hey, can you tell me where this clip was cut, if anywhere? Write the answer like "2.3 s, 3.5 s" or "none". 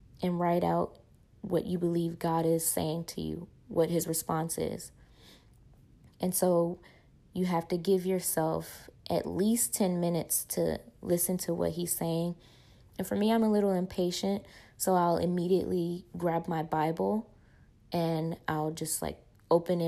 none